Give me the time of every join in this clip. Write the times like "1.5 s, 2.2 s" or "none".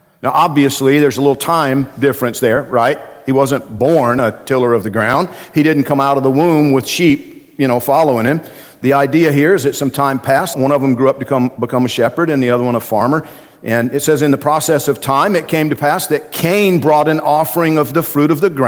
10.5 s